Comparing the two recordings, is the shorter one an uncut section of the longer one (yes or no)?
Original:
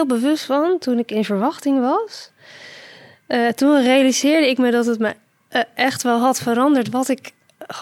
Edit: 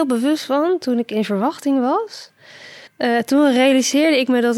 no